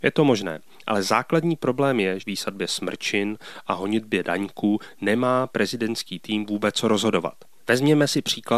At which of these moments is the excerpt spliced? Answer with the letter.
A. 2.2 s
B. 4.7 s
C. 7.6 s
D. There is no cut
A